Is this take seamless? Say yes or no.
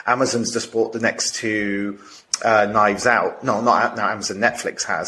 yes